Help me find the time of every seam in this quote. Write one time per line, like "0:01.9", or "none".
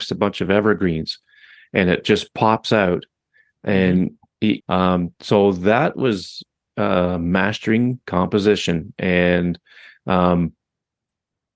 0:04.6